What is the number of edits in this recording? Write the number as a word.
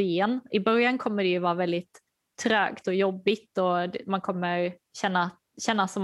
zero